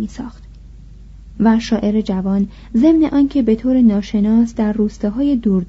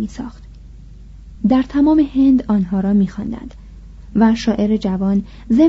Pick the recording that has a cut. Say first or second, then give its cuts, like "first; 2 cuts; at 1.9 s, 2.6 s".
first; 1 cut; at 1.4 s